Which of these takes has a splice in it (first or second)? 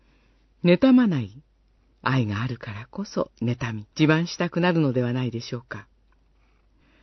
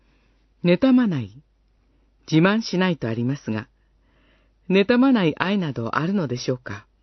first